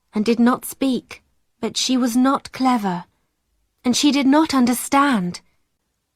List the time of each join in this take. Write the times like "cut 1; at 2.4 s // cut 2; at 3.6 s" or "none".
cut 1; at 1.5 s